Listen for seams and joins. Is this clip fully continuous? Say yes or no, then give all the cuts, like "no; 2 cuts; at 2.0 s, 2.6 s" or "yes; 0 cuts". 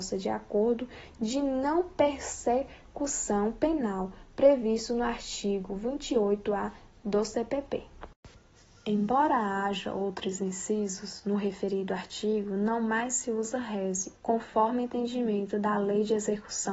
no; 1 cut; at 14.2 s